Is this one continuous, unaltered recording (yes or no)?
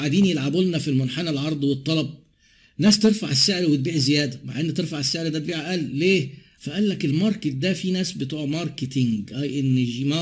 no